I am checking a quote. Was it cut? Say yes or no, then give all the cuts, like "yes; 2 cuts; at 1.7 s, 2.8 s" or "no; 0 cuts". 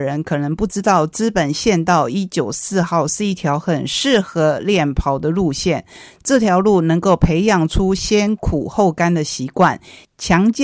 no; 0 cuts